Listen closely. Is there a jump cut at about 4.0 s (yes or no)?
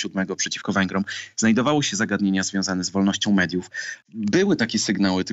yes